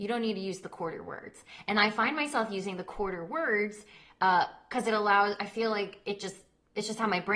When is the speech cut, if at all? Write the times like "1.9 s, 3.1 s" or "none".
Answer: none

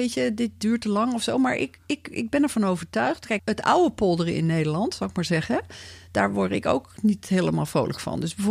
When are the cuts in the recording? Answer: 3.4 s

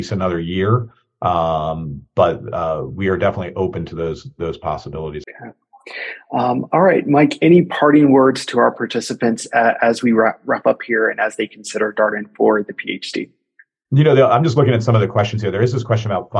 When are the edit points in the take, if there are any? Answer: 5.2 s

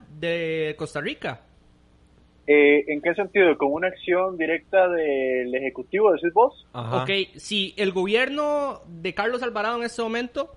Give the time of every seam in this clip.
none

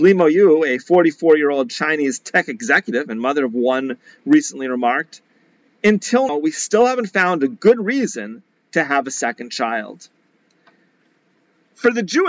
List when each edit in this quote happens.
6.3 s

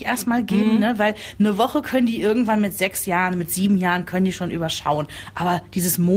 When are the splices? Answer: none

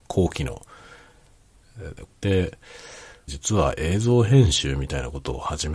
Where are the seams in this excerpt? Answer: 2.1 s, 3.3 s

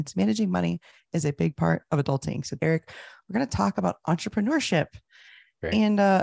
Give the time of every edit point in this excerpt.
2.6 s

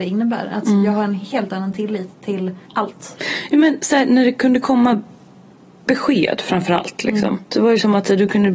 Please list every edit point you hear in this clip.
2.6 s, 7.5 s

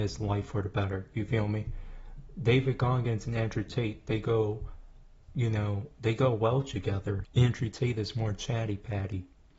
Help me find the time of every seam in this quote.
7.2 s

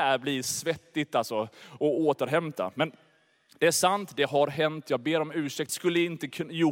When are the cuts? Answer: 5.7 s

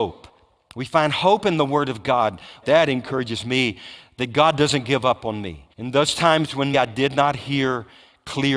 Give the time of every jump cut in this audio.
2.6 s, 5.7 s, 6.7 s

